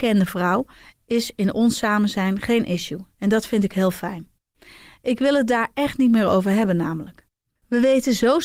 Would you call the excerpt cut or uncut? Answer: uncut